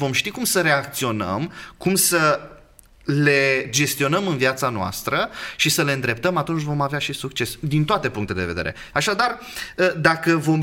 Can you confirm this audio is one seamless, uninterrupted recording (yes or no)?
no